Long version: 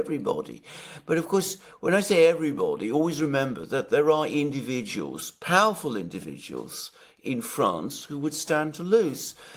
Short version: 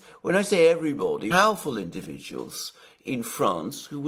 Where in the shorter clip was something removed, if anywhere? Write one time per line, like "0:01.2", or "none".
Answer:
0:01.3